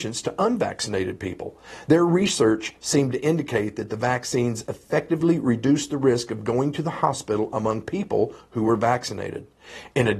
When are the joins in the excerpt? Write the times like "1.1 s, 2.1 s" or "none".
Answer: none